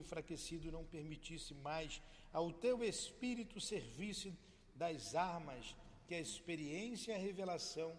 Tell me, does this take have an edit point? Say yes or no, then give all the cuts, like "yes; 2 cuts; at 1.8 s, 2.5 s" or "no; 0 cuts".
no; 0 cuts